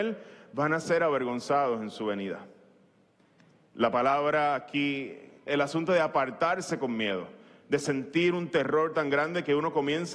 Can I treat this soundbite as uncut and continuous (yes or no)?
no